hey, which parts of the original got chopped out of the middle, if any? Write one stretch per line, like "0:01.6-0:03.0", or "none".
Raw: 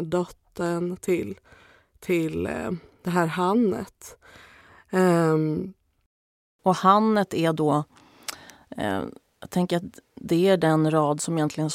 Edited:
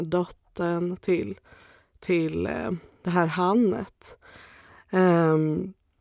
none